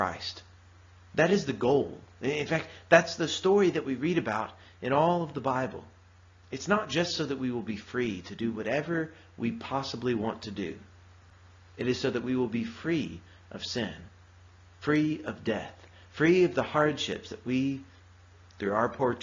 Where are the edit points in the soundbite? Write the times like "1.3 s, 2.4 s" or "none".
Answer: none